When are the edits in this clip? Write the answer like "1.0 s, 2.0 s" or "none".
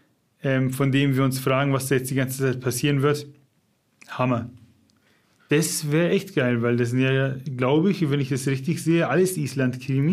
5.4 s